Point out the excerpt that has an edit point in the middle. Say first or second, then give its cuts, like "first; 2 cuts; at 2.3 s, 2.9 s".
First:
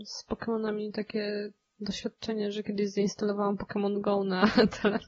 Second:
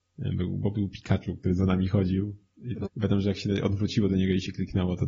second; 1 cut; at 2.8 s